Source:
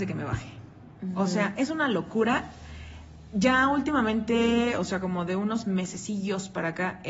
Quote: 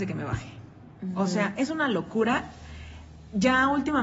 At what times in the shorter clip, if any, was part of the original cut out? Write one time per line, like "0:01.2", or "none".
none